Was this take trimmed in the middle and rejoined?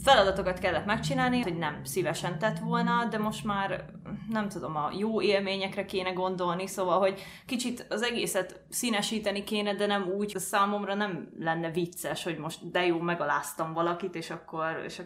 yes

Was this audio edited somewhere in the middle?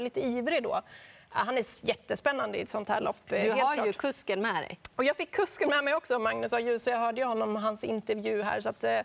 no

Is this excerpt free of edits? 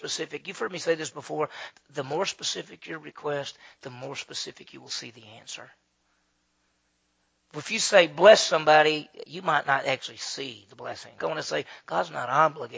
no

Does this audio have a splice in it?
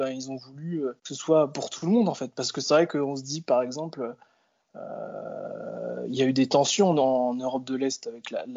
yes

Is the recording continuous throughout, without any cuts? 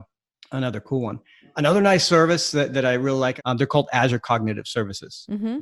yes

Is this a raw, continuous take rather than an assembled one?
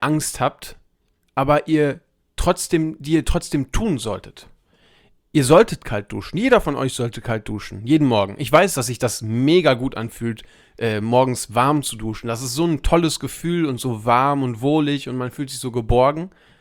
yes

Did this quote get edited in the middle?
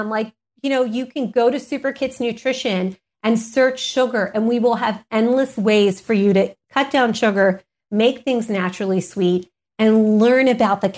no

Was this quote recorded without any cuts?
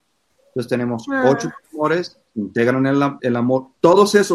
no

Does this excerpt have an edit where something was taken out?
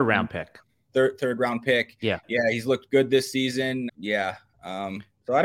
yes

